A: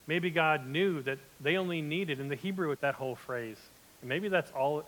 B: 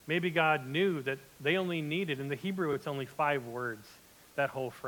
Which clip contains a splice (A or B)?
A